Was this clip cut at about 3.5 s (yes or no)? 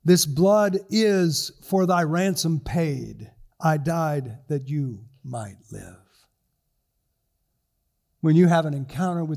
yes